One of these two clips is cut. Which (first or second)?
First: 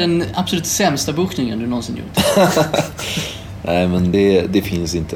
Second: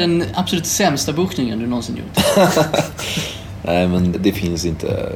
second